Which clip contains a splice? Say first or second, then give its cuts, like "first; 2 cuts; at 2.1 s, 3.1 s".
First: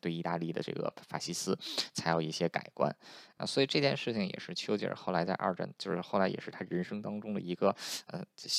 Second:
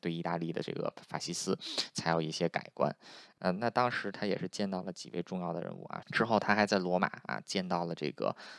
second; 2 cuts; at 3.4 s, 6.0 s